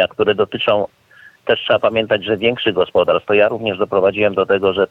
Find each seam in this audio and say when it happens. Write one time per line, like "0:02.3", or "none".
none